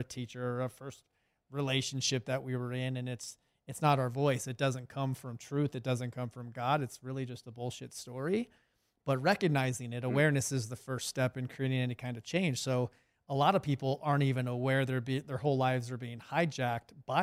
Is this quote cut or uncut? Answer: uncut